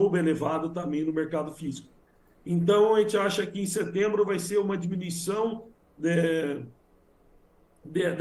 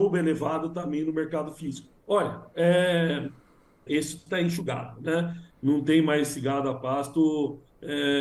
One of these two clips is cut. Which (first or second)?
second